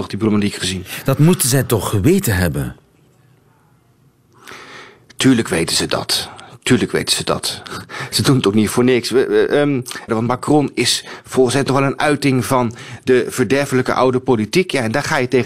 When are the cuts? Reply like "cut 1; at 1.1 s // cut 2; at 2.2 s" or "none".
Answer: cut 1; at 10.1 s

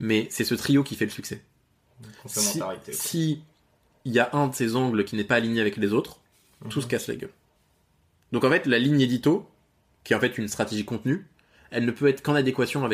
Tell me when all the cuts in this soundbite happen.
none

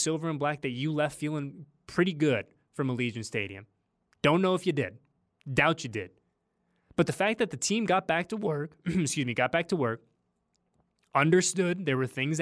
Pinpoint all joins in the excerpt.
none

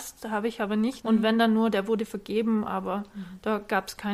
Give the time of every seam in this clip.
cut 1; at 1.0 s

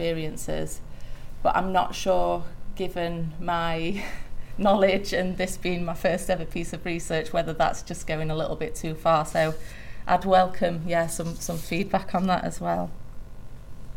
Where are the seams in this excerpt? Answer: none

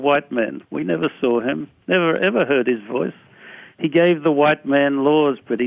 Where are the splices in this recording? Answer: none

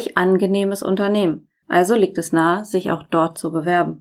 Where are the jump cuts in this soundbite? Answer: cut 1; at 1.6 s

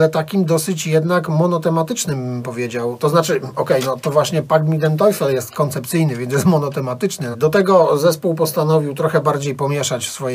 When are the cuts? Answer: cut 1; at 7.3 s

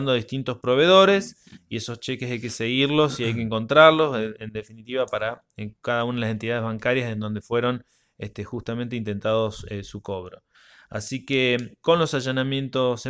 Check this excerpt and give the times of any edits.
cut 1; at 11.8 s

